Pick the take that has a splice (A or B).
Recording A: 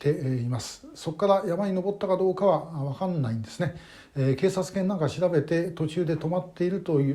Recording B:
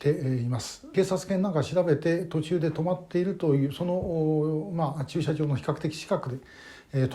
B